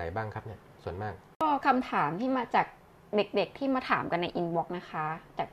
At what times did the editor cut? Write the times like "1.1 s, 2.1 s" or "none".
none